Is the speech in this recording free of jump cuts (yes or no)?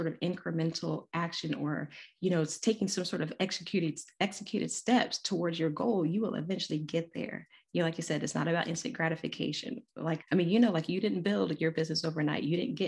no